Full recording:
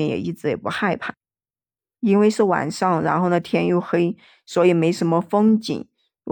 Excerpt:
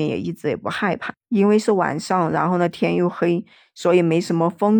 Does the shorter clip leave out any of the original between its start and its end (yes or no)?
yes